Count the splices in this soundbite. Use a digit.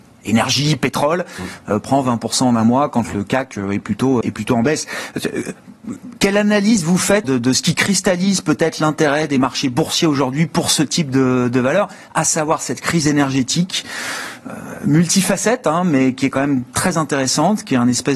2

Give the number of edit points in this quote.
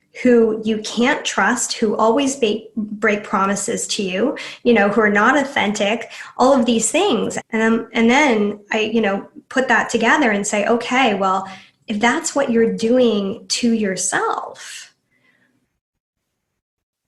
1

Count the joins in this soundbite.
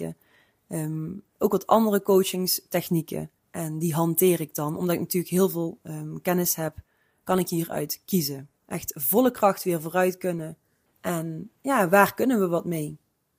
3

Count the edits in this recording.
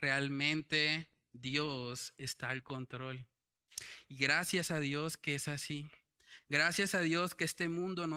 0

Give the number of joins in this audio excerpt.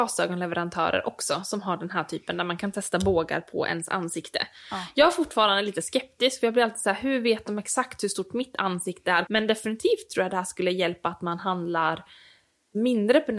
1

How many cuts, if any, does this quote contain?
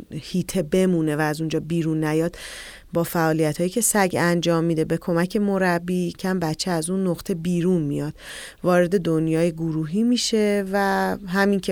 1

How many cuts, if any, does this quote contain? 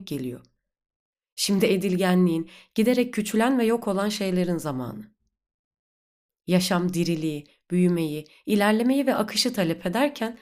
0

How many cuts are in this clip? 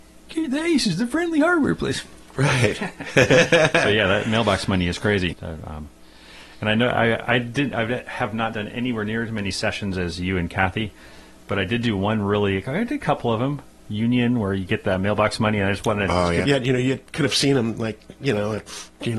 2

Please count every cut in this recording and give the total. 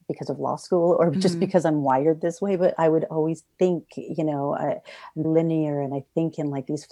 1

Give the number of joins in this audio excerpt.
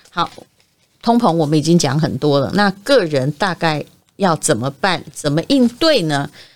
0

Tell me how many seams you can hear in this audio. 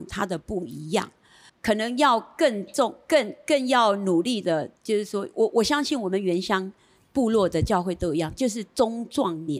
2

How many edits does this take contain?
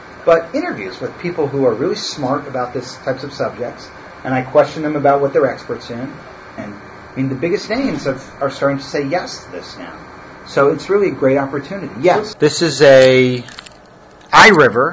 2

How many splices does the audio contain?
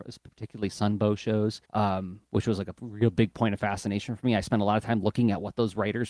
1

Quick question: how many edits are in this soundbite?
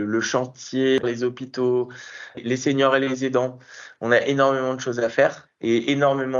2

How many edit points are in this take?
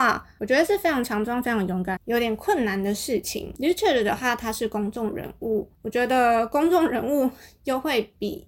2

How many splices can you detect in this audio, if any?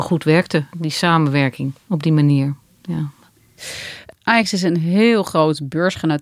0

